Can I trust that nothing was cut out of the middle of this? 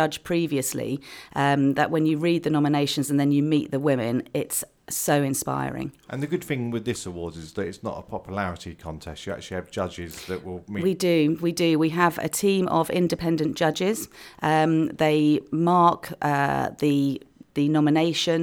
yes; 0 cuts

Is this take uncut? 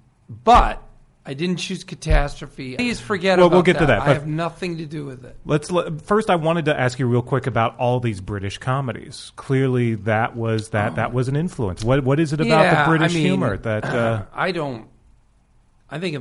no; 1 cut; at 2.8 s

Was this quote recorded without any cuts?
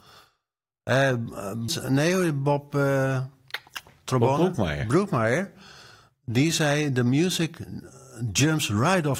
no; 1 cut; at 1.7 s

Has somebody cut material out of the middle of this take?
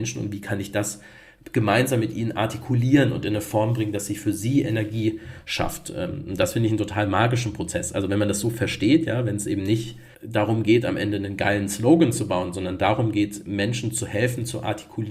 yes; 1 cut; at 10.1 s

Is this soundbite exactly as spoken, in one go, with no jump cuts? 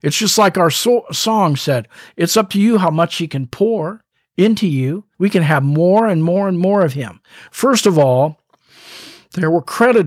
no; 2 cuts; at 5.1 s, 7.5 s

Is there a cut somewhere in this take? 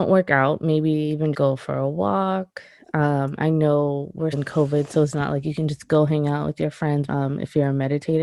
yes; 3 cuts; at 1.3 s, 4.3 s, 7.1 s

